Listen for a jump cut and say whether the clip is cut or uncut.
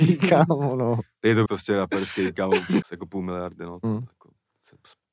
cut